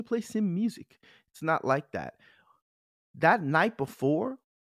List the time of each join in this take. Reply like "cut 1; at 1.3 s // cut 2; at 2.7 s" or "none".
none

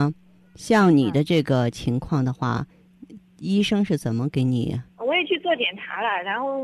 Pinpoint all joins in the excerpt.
none

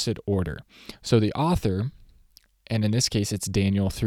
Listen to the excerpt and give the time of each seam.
none

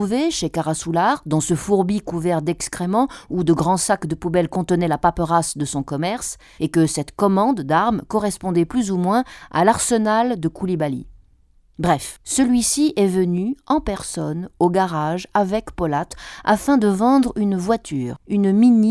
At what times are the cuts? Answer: cut 1; at 6.6 s

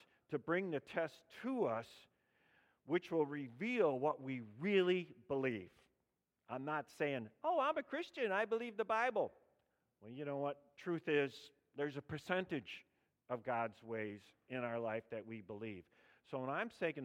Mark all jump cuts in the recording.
none

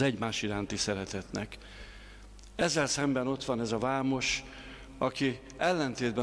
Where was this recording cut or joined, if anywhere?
none

